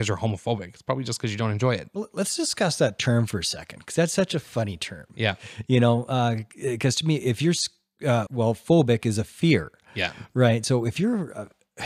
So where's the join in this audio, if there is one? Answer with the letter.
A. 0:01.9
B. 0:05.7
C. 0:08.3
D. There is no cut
C